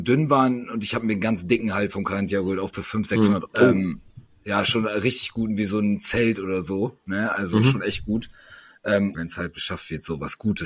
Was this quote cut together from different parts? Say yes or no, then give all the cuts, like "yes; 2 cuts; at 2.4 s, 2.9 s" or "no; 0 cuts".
yes; 2 cuts; at 3.5 s, 9.1 s